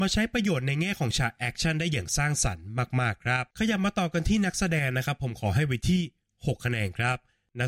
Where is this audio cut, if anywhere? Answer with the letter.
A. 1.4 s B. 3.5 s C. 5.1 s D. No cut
B